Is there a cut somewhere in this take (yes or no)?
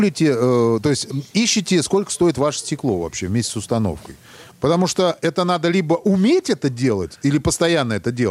yes